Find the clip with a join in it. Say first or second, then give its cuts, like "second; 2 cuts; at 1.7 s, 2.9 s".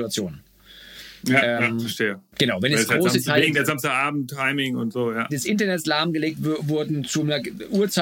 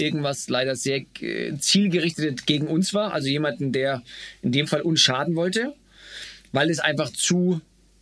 first; 1 cut; at 5.3 s